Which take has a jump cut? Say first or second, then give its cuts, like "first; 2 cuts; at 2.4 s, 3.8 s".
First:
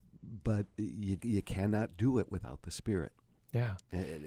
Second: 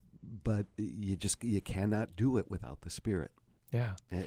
first; 1 cut; at 1.2 s